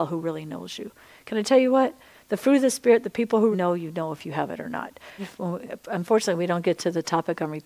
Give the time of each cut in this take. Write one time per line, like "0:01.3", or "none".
0:03.5
0:05.2